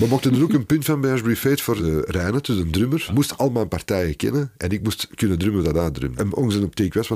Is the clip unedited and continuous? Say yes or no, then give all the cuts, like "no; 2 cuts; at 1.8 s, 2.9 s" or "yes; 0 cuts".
yes; 0 cuts